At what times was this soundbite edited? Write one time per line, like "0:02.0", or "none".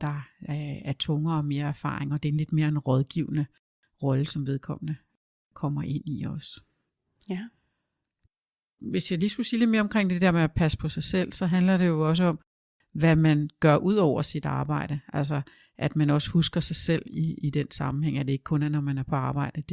none